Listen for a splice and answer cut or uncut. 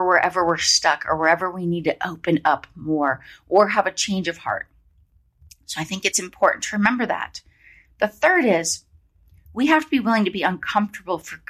uncut